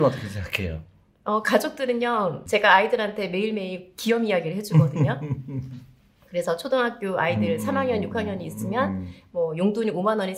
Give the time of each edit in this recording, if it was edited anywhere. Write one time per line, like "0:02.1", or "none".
none